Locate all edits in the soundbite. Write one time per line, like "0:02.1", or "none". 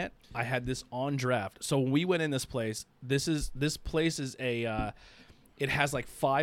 none